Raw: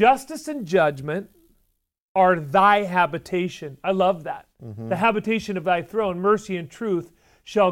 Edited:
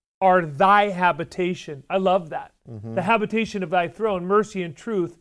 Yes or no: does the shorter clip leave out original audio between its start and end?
no